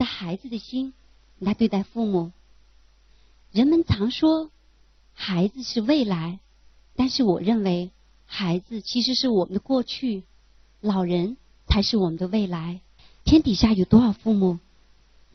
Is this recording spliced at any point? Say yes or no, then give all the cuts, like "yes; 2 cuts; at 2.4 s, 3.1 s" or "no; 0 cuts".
yes; 1 cut; at 13.2 s